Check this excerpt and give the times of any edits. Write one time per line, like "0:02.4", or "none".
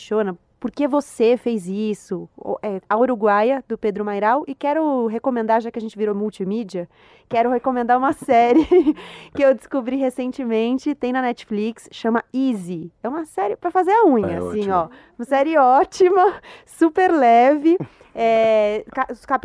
0:02.8